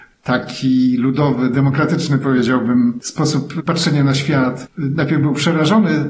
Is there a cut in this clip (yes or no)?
no